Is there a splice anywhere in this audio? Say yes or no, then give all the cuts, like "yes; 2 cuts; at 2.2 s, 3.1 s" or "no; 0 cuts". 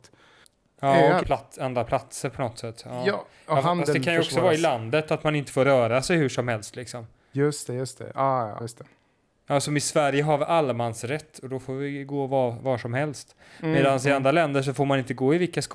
yes; 2 cuts; at 1.2 s, 8.6 s